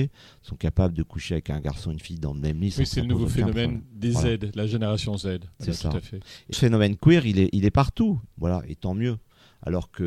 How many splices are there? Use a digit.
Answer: 2